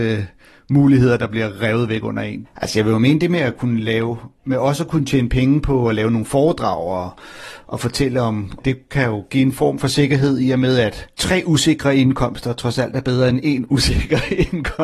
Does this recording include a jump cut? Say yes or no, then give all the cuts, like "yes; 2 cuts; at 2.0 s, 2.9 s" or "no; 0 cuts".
yes; 3 cuts; at 2.4 s, 8.6 s, 11.1 s